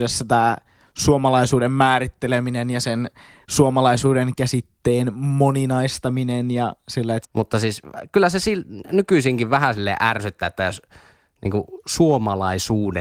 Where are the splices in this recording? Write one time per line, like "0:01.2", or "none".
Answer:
0:07.2

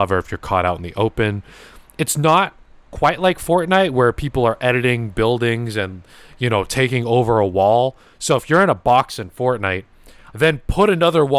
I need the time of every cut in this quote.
0:10.3

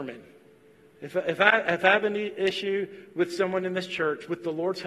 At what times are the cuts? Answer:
none

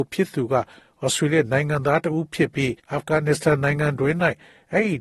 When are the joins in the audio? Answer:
0:02.8

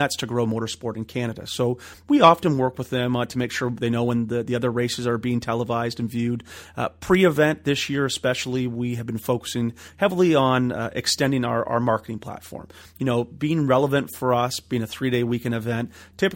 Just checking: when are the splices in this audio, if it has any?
none

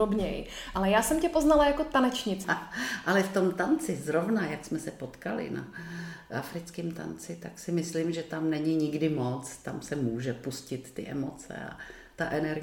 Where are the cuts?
0:02.4

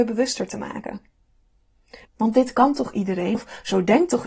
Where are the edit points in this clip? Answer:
0:02.0
0:03.3

